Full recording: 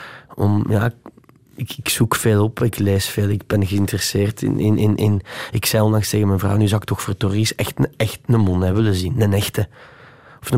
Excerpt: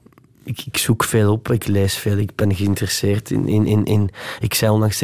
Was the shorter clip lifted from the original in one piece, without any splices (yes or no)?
yes